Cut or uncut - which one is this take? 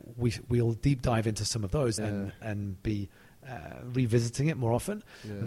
cut